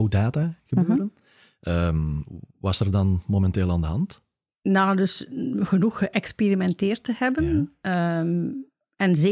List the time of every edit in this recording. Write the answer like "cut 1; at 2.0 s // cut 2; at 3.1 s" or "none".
none